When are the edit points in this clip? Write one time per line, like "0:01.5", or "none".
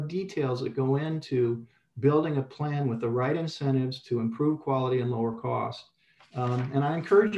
0:06.2

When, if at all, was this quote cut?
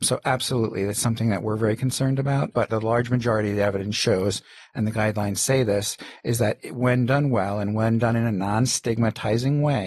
none

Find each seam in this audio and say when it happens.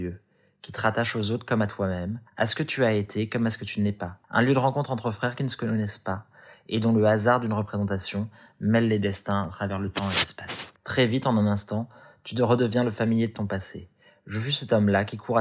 0:02.3
0:04.2
0:10.8

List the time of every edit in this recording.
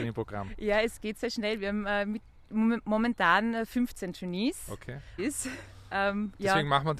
0:05.2

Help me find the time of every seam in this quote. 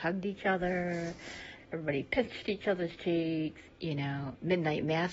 0:01.6
0:03.7

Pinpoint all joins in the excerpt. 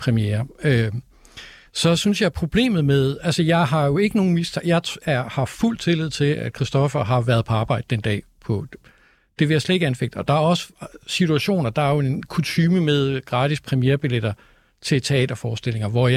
0:01.7

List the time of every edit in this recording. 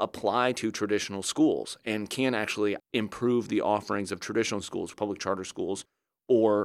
0:02.8
0:04.9

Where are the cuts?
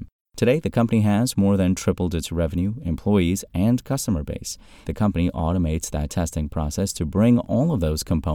0:04.8

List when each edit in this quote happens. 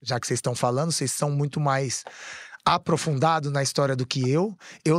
none

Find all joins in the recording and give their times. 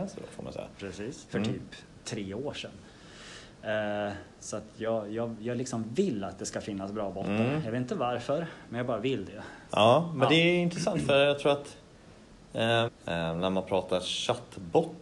0:01.3
0:09.7
0:12.9

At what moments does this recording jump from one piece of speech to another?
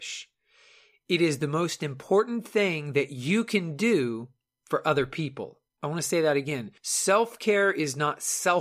0:06.8

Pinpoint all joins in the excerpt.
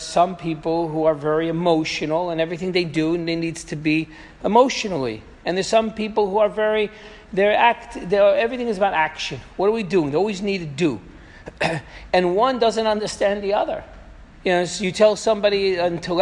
0:14.3

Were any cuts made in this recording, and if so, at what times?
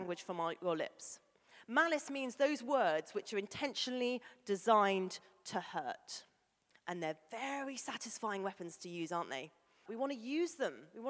0:06.7
0:09.9

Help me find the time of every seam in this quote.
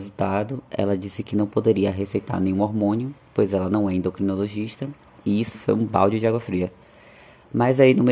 0:05.5

